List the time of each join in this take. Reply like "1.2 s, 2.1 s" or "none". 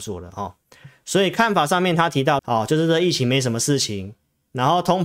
2.4 s